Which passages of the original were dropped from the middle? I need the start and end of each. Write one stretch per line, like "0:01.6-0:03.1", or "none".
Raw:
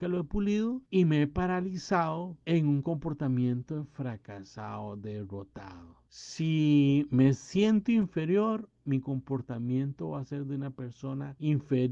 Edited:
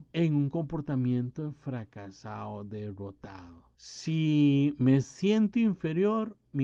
none